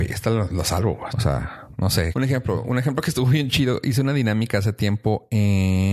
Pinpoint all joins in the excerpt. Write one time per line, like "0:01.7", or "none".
0:01.1
0:02.1